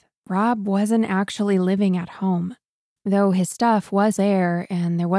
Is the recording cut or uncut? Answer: cut